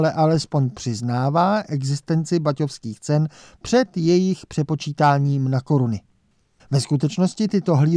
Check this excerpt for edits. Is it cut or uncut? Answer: cut